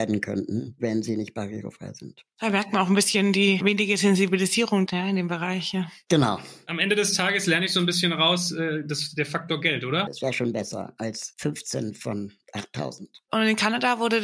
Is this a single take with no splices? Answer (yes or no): no